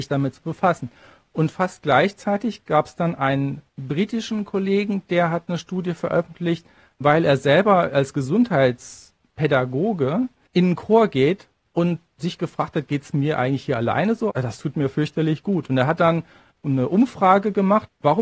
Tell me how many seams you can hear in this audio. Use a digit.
1